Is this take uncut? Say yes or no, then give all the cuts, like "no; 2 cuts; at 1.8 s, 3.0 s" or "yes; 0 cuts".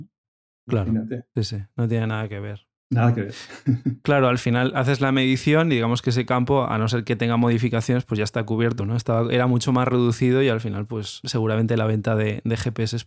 no; 1 cut; at 8.8 s